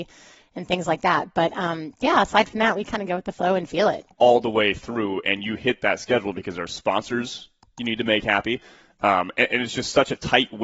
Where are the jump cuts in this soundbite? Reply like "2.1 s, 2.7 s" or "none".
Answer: 4.2 s